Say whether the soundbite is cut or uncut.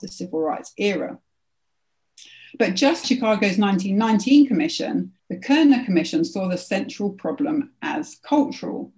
cut